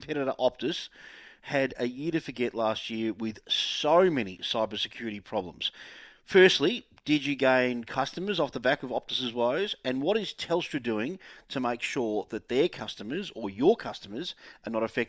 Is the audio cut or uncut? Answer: uncut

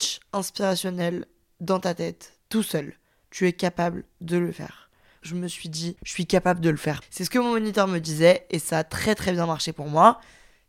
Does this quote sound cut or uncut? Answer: cut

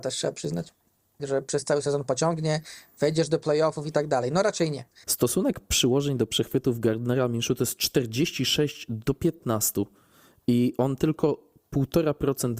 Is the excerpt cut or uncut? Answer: cut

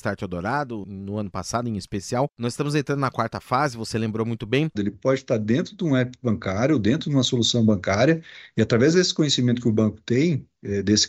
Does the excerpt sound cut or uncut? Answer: cut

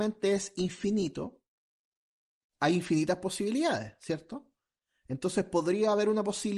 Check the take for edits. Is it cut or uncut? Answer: uncut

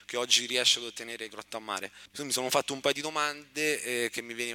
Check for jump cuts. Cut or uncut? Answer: cut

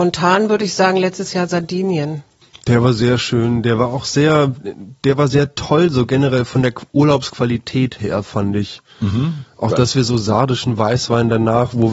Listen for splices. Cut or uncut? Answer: uncut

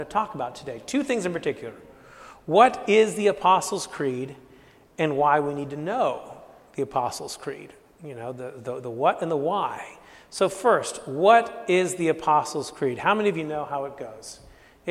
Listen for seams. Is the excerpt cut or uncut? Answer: uncut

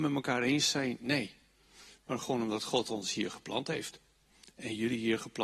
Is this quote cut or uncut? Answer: uncut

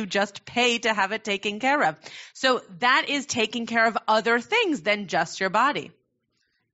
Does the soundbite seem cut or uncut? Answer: uncut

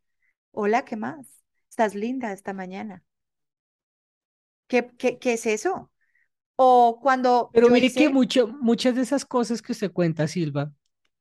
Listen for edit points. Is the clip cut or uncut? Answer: uncut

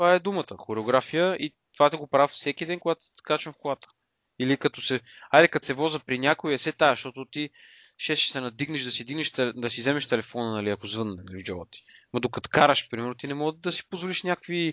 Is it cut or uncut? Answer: uncut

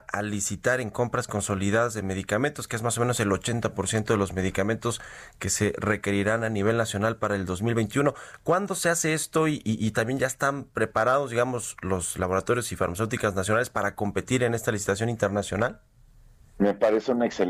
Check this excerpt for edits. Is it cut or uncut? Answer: uncut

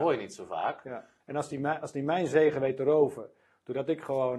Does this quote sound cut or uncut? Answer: cut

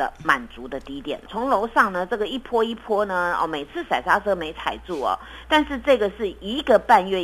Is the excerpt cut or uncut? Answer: cut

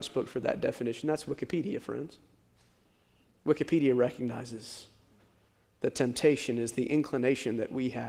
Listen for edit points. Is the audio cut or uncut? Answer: uncut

